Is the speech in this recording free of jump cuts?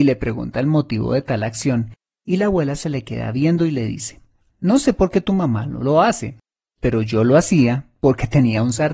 yes; 0 cuts

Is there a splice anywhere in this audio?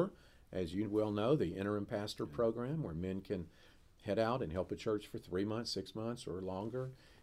no; 0 cuts

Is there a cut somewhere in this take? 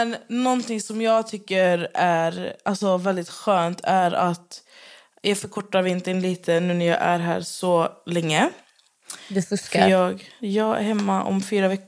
yes; 1 cut; at 10.4 s

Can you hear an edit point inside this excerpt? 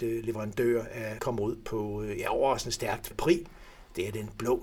yes; 2 cuts; at 1.2 s, 3.1 s

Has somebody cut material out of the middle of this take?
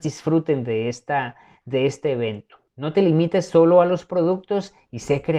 no; 0 cuts

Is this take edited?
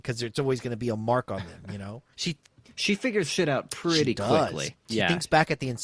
yes; 2 cuts; at 2.1 s, 4.7 s

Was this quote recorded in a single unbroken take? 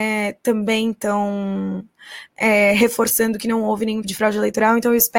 no; 1 cut; at 4.0 s

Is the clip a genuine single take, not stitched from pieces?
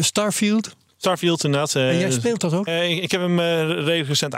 no; 1 cut; at 2.7 s

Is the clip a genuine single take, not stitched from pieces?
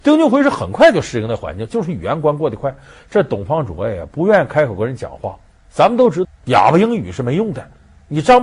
no; 1 cut; at 6.2 s

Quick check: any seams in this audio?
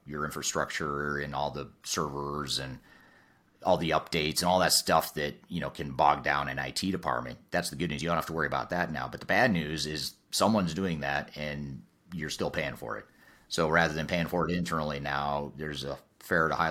no; 0 cuts

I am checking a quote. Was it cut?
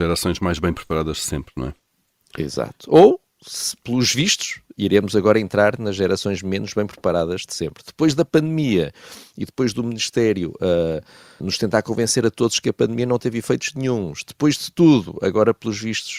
yes; 2 cuts; at 11.4 s, 14.2 s

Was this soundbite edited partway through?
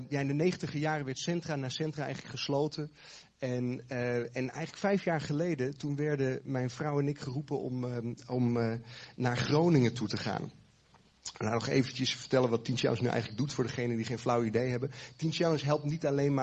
no; 0 cuts

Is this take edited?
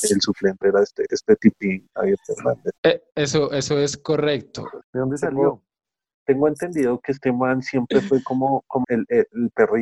yes; 3 cuts; at 2.8 s, 4.8 s, 8.8 s

